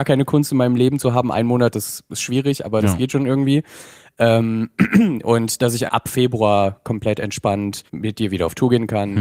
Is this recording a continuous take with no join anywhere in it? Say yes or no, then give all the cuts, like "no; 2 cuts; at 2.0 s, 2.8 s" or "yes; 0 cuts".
no; 2 cuts; at 5.9 s, 7.9 s